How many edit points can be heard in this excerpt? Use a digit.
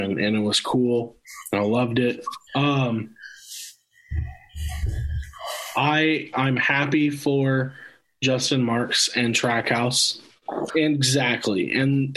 2